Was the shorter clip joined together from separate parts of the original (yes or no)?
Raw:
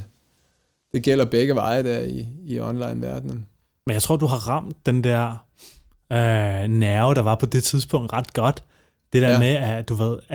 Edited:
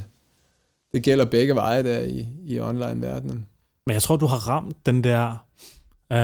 no